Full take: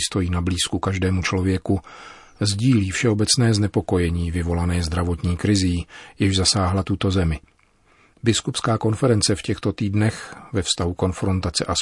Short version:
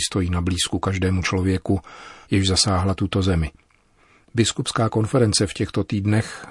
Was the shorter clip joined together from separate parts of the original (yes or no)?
yes